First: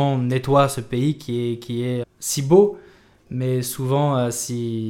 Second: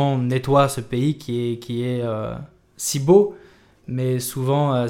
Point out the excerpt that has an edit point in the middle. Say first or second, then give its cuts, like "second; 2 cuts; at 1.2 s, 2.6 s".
first; 1 cut; at 2.0 s